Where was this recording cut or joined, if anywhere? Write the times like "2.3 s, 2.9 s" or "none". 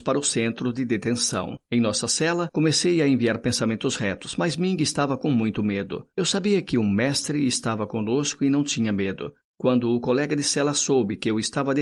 none